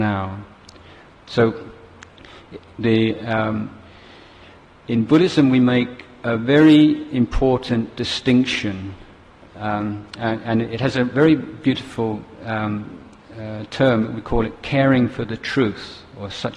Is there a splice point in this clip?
no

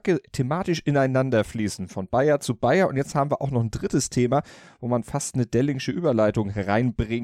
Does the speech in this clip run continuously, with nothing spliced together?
yes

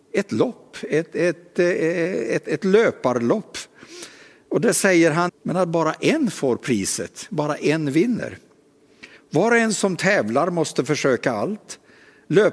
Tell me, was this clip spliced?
yes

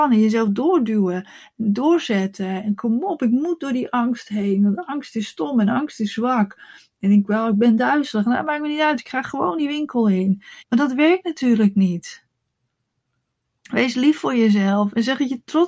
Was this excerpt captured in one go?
no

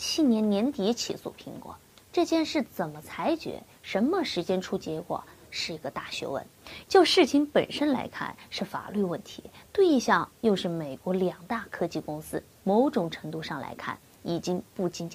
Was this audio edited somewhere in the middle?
yes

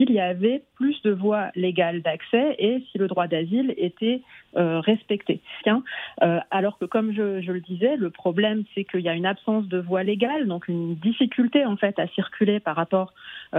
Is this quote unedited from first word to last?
no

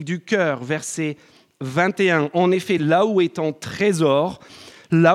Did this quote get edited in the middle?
no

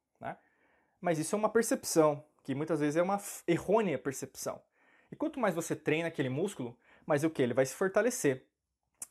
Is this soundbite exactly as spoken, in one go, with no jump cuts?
yes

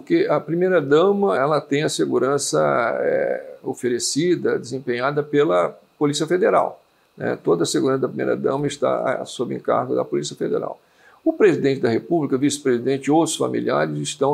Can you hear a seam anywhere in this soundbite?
yes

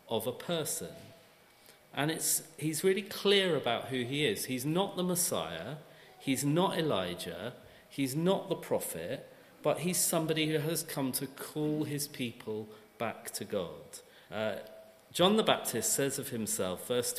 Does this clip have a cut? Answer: yes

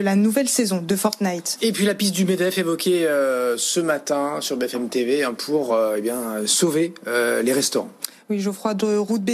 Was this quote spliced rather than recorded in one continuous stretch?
no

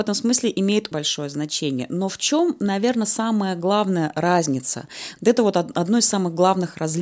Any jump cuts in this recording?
yes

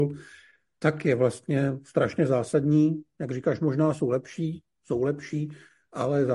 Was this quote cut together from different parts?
no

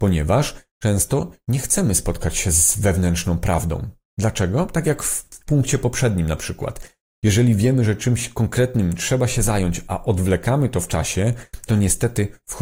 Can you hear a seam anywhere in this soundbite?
no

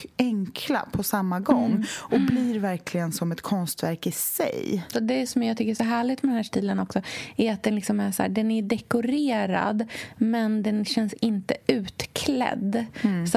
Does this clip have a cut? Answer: yes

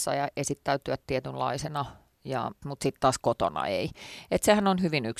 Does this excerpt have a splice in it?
yes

